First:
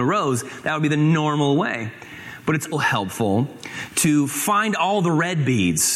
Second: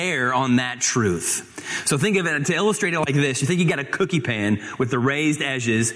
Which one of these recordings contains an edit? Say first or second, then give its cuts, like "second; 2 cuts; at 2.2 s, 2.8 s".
first; 1 cut; at 2.7 s